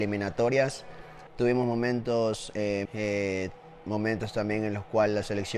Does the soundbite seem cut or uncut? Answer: cut